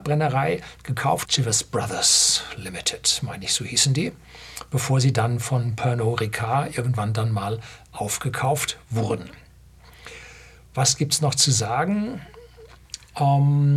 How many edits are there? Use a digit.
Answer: 1